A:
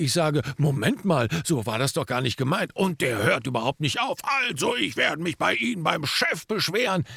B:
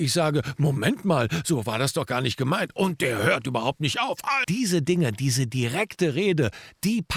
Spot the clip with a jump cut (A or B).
B